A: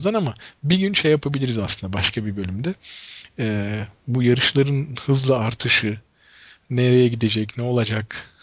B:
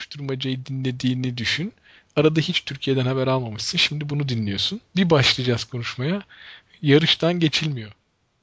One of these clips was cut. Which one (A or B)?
B